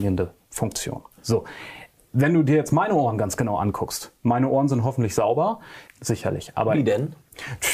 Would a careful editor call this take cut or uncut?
cut